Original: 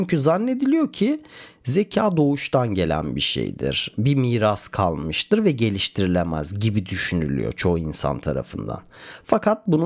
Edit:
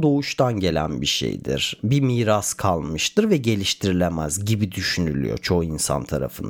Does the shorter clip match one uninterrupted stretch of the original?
yes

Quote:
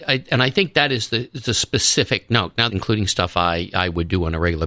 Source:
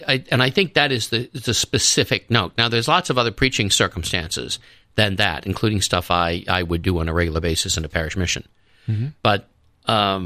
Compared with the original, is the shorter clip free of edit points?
no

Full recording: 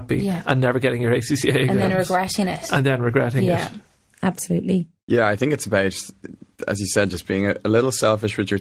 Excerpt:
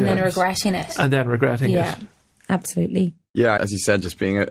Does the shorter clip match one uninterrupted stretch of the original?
no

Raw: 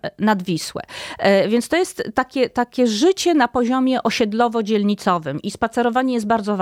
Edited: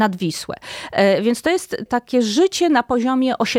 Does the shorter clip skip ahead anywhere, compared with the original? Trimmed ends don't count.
yes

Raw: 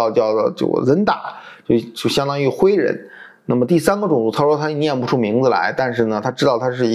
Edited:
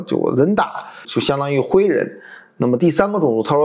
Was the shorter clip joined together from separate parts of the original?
yes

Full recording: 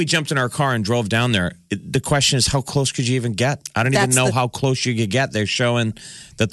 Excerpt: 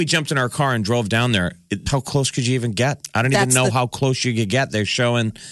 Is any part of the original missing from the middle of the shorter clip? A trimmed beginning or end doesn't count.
yes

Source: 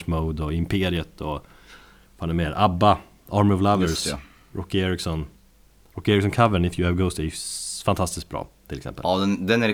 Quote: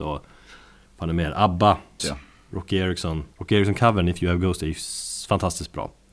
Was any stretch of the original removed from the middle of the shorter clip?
yes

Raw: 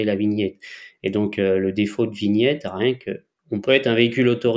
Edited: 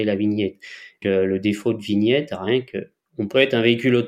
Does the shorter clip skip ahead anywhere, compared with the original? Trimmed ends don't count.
yes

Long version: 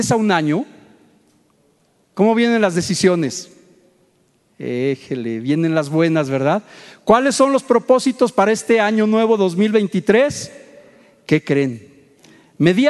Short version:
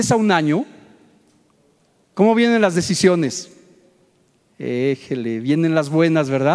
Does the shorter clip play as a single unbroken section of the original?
yes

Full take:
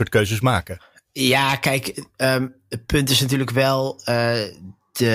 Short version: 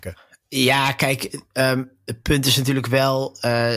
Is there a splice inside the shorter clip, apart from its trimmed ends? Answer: no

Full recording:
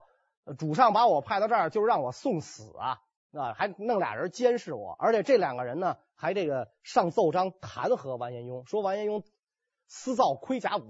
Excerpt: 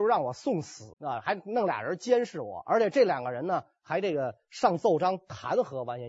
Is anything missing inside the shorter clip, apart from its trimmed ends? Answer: yes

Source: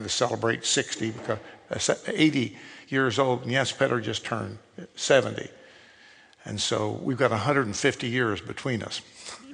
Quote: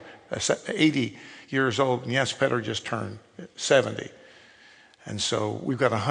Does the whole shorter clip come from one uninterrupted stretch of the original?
yes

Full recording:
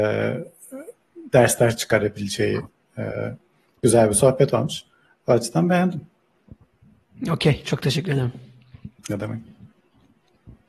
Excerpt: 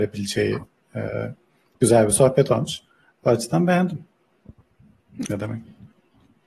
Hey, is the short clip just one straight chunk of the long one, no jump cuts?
no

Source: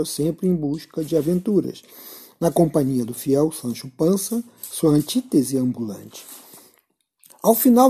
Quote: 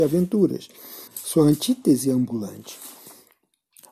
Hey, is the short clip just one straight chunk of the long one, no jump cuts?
no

